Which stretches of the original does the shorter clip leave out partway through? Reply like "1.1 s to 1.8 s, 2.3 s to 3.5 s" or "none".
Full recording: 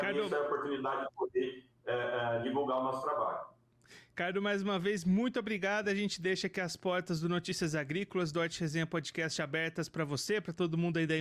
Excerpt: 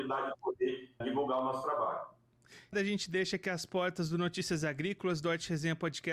1.7 s to 2.4 s, 4.1 s to 5.8 s